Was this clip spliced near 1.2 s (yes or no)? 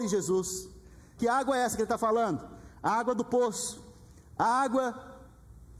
yes